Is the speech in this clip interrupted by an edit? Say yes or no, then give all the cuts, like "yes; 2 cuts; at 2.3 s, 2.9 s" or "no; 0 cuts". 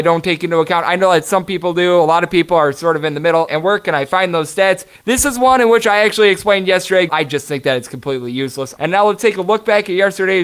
yes; 3 cuts; at 3.5 s, 7.1 s, 8.8 s